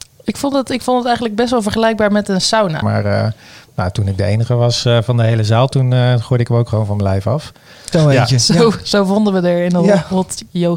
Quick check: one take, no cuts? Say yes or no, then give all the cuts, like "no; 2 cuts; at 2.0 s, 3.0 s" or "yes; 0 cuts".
no; 2 cuts; at 2.8 s, 7.9 s